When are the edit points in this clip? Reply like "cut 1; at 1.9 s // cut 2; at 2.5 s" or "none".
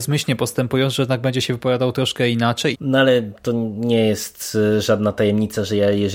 cut 1; at 2.7 s